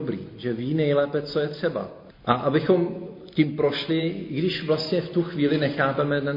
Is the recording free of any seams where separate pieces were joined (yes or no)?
yes